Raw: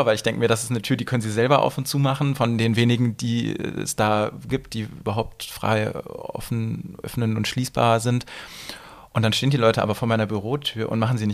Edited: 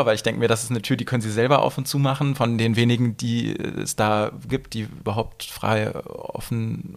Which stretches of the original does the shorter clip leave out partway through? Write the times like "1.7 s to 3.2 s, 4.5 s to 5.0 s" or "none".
none